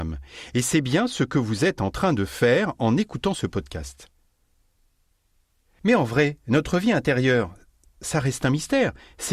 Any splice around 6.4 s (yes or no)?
no